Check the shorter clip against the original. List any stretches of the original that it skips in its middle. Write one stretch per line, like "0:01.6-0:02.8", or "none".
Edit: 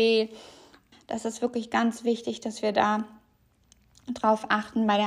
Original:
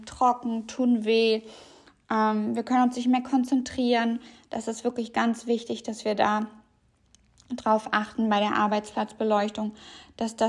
0:02.1-0:04.3